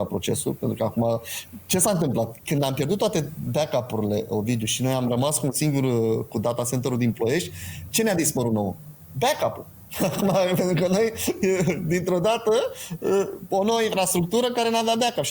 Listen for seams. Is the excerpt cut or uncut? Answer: uncut